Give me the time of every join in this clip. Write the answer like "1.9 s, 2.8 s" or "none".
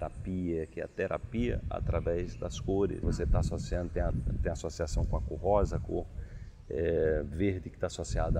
3.0 s